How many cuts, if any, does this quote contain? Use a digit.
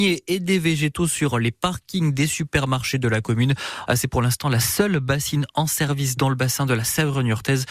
1